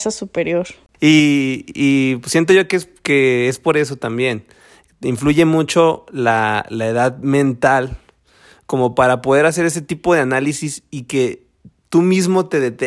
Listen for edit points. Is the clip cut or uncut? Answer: uncut